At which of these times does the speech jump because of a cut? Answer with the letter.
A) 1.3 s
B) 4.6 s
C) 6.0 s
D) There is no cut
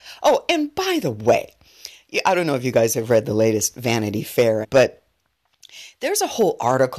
B